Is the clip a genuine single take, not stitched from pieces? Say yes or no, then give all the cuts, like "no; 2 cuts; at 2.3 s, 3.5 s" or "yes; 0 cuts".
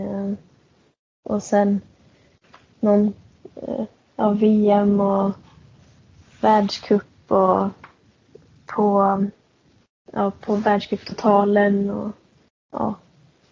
yes; 0 cuts